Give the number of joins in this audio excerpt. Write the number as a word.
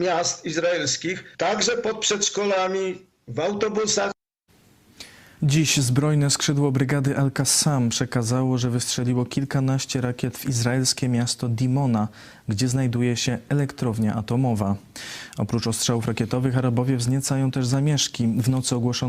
one